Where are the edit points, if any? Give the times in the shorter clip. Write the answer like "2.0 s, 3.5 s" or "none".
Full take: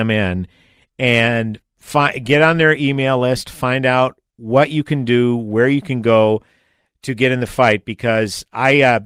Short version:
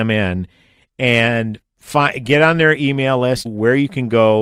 3.4 s